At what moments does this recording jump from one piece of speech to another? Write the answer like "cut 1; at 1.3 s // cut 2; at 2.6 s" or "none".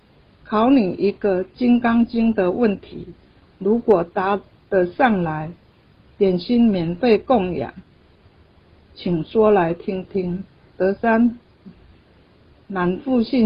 none